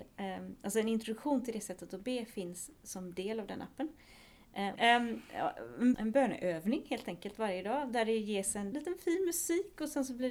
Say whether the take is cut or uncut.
cut